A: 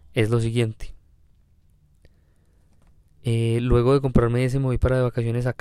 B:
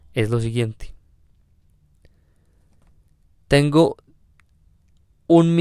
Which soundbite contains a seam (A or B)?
A